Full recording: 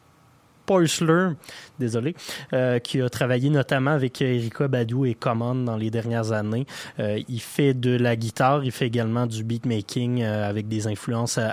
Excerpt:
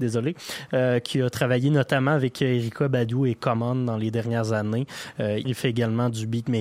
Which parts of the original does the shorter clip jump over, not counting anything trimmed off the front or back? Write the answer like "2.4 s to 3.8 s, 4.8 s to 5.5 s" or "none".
7.2 s to 8.6 s